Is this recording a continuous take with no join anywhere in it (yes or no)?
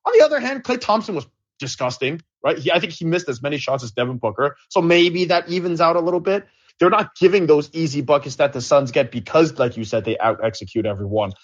no